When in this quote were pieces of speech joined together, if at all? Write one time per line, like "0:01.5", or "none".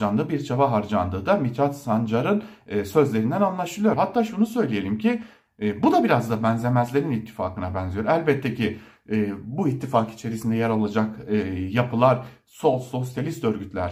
0:03.9